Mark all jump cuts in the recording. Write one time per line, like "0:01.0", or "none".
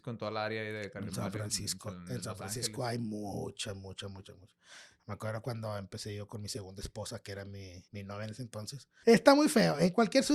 0:07.9
0:09.0